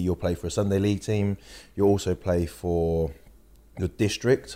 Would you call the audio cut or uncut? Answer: uncut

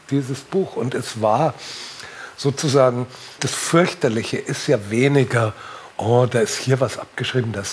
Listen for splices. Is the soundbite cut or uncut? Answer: cut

